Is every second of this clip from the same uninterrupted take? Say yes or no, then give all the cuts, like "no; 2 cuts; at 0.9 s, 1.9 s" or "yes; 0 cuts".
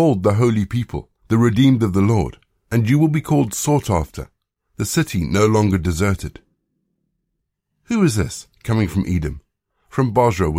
no; 1 cut; at 1.2 s